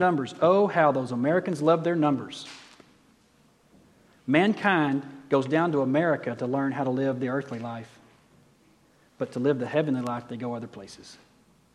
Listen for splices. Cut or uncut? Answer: uncut